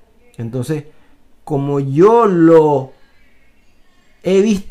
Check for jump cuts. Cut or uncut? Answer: uncut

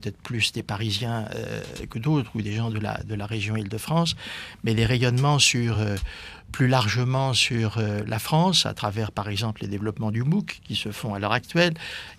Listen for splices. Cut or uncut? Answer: uncut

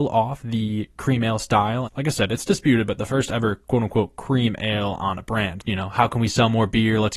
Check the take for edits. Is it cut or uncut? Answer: cut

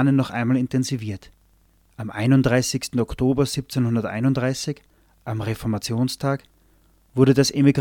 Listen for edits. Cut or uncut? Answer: cut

